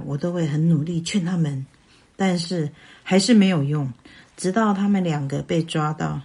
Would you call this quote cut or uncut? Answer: uncut